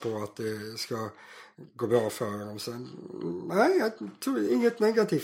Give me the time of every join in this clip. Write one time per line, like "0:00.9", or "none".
none

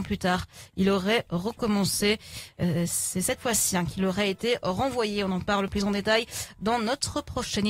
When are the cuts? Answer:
none

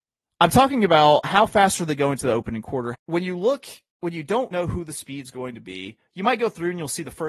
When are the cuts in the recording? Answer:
0:02.9
0:04.5

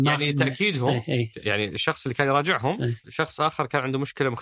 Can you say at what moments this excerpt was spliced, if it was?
0:03.0

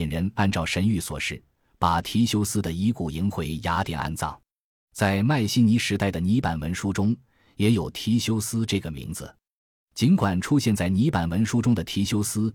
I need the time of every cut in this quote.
0:04.8

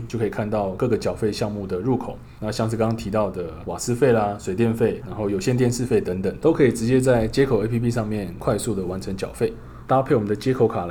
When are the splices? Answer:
0:09.9

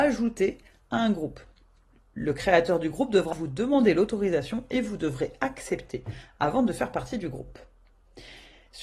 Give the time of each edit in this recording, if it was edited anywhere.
0:03.3

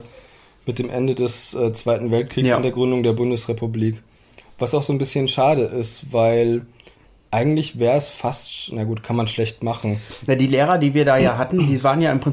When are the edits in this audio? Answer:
none

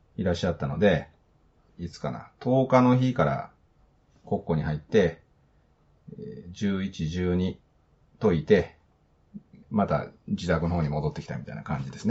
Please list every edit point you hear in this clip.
0:01.7
0:09.6

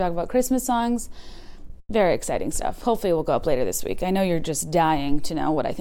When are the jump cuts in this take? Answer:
none

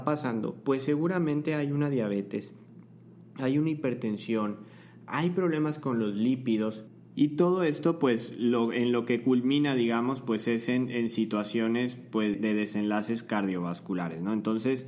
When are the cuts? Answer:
0:12.3

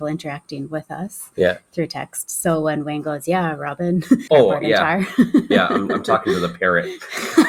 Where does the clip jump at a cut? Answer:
0:04.3

